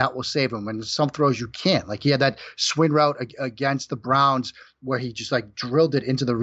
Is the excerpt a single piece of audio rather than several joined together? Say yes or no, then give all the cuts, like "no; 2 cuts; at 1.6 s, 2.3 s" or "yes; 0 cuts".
yes; 0 cuts